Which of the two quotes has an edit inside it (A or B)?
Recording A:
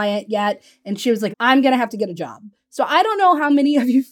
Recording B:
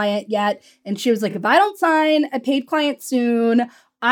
A